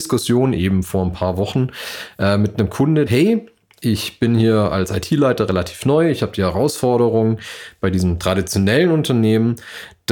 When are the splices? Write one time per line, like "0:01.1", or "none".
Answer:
0:03.1